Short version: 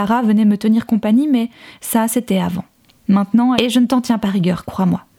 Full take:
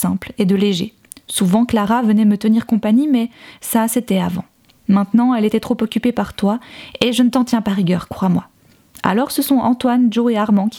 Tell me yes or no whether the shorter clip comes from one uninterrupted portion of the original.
no